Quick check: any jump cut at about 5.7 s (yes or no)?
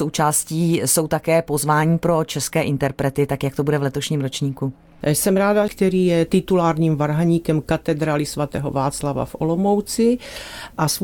yes